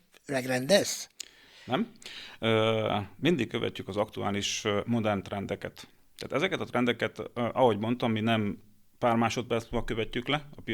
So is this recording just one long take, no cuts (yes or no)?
yes